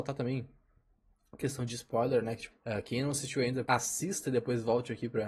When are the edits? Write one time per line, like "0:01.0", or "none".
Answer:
0:02.5
0:03.7